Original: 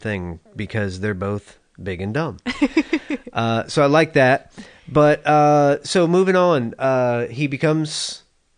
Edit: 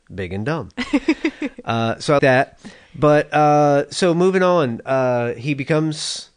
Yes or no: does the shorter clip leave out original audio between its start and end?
yes